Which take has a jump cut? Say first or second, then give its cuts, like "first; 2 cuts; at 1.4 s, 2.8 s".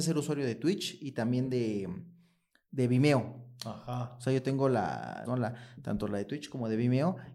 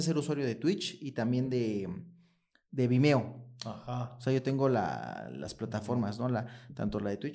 first; 1 cut; at 5.2 s